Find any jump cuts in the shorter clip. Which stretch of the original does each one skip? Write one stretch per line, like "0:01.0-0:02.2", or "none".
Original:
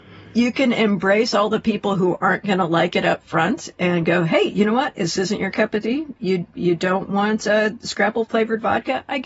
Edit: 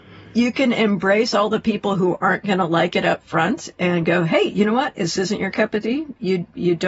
none

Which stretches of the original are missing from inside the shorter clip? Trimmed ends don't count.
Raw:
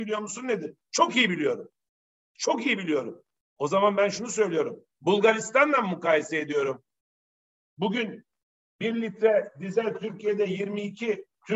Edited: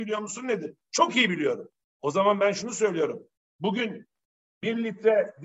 0:01.8-0:03.4
0:04.9-0:07.5

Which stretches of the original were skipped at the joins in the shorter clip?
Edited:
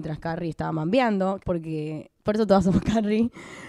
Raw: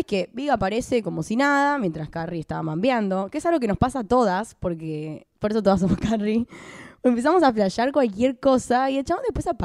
0:03.3-0:04.6

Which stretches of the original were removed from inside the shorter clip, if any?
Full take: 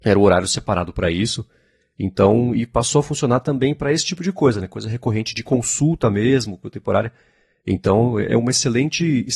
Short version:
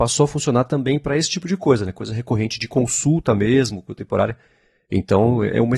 none

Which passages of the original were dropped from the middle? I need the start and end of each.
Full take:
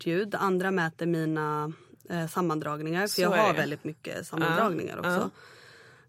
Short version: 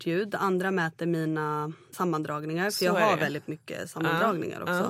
0:01.9-0:02.3

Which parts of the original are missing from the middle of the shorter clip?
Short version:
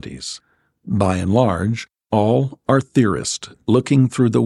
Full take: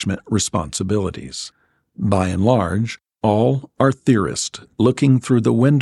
none

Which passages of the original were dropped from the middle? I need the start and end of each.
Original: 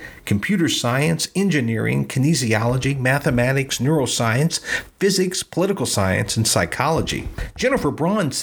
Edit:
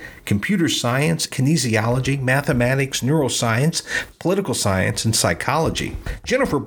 0:01.3-0:02.1
0:04.9-0:05.4

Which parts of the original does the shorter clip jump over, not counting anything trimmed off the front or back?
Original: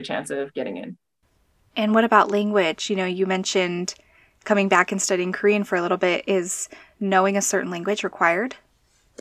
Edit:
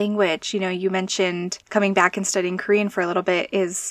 0:04.0-0:04.4

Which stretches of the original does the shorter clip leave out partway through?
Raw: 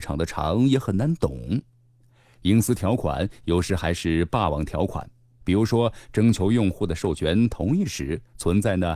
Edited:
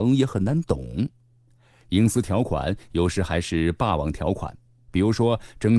none

